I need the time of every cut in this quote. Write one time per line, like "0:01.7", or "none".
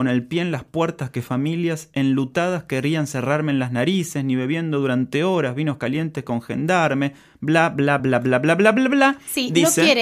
0:08.0

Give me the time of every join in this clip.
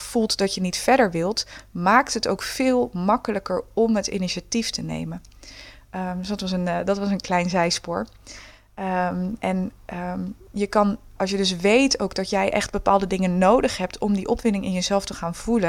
0:09.4
0:11.2

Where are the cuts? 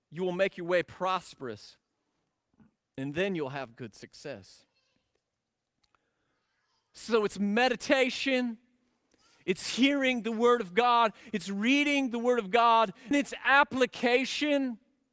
0:13.1

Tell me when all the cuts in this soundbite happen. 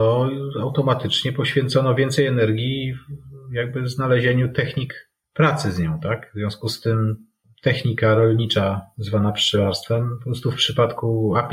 none

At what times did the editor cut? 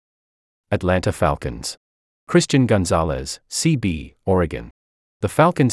none

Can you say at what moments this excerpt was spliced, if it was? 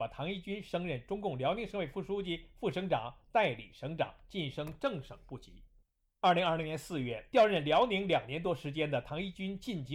none

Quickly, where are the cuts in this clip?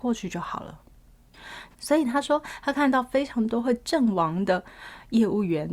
0:01.7

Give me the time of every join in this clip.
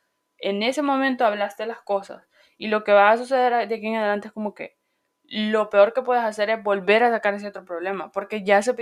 none

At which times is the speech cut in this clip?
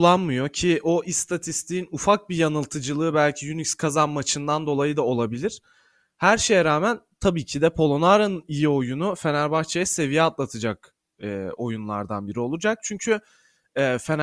none

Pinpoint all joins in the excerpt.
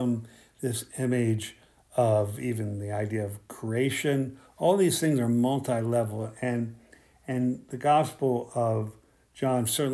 none

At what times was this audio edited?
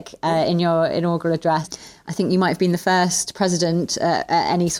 0:01.6

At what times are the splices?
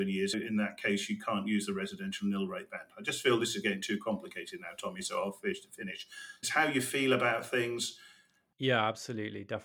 0:06.4

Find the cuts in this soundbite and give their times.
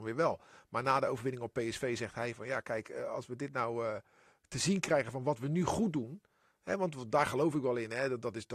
none

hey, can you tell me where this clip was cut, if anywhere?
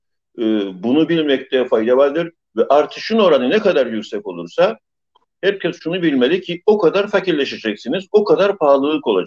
none

